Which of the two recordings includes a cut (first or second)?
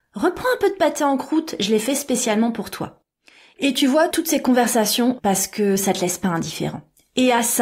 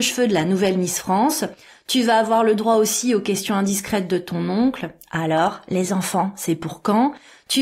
first